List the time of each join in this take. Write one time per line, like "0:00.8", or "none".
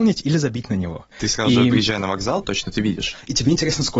0:01.1
0:02.4